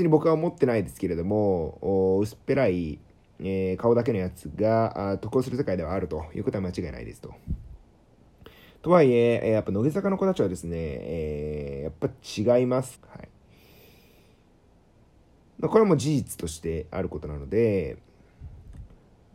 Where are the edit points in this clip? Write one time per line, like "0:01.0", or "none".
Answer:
0:12.9